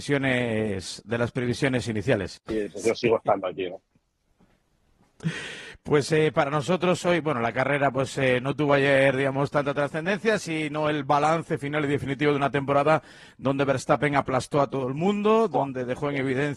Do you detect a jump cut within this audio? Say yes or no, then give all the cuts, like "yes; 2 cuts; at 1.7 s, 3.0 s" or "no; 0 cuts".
yes; 1 cut; at 2.4 s